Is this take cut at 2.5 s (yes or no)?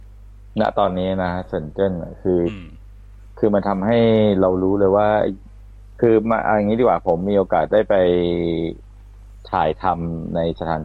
yes